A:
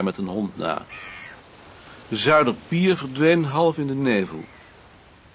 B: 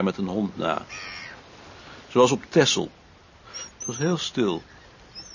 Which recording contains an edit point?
B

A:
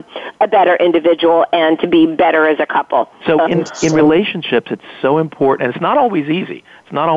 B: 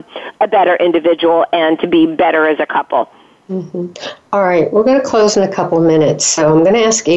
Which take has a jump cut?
A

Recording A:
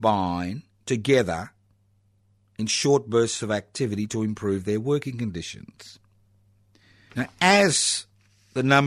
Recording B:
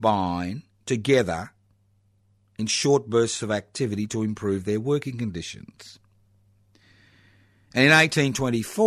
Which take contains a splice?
A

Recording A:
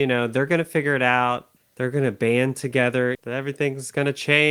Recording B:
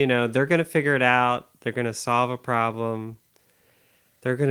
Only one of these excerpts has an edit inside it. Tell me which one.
A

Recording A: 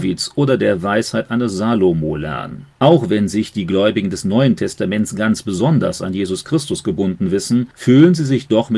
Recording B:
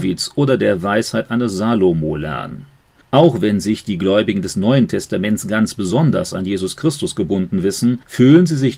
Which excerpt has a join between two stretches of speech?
A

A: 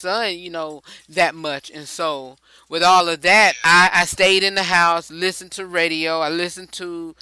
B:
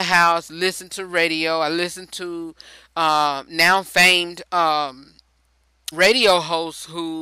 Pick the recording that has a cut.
B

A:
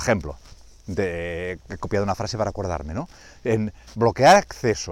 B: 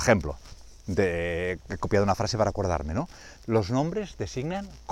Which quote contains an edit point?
B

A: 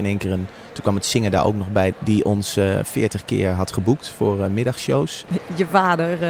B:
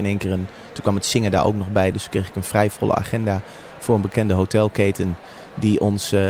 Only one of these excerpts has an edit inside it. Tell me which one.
A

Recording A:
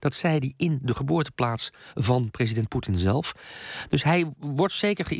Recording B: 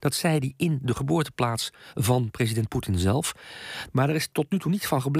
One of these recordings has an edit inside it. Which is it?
B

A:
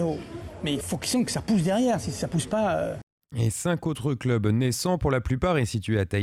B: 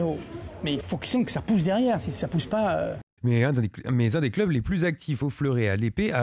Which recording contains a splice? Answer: B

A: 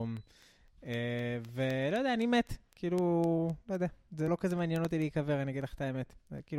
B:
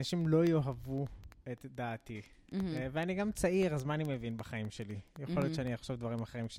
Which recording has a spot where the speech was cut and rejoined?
A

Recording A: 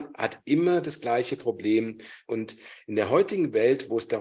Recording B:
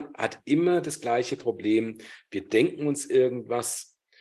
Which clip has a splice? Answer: A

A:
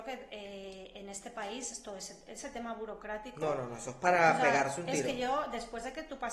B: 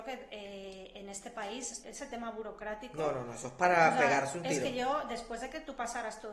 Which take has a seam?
B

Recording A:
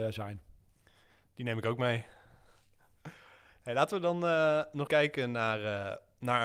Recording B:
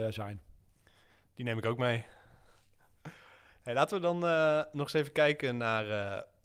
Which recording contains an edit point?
A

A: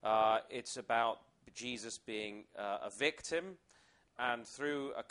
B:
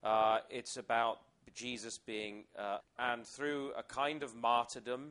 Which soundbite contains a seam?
B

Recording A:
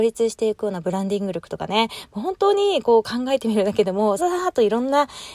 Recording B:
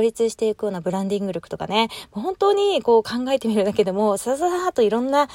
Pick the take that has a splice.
A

